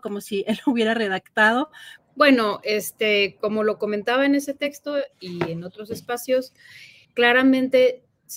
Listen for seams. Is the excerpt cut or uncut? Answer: cut